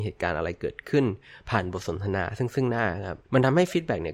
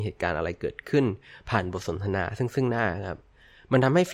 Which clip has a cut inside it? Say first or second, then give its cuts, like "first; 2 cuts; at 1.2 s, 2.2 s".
first; 1 cut; at 3.2 s